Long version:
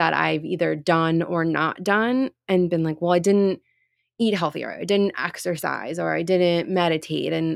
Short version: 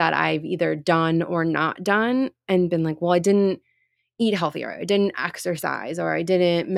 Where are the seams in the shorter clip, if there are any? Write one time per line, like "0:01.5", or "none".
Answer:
none